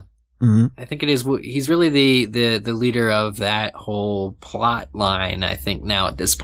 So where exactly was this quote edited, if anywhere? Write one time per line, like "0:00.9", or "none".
none

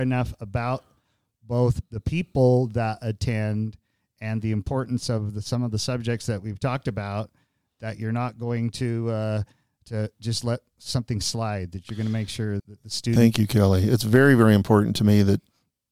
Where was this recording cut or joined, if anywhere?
0:12.6

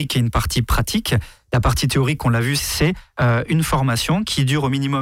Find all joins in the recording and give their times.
0:02.6

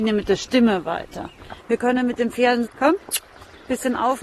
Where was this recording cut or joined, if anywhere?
0:01.6
0:02.7

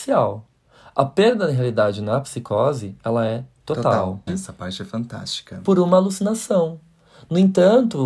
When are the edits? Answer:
0:04.3

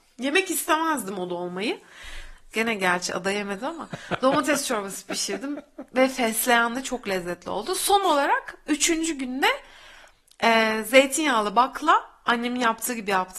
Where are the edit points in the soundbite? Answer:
0:02.5

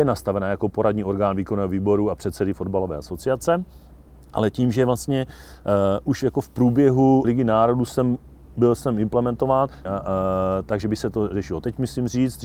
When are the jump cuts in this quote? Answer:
0:07.2
0:09.9

